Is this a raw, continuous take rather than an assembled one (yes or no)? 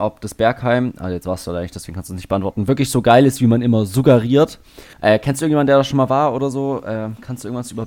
no